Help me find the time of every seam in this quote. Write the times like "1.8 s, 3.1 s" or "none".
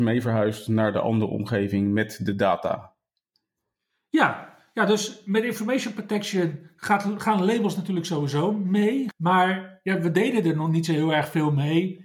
9.1 s